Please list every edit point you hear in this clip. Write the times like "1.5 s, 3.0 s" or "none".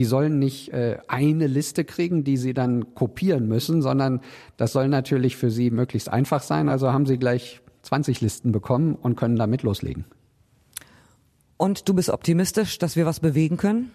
none